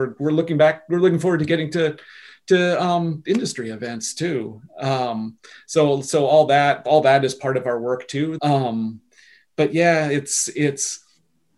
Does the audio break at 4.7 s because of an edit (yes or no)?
no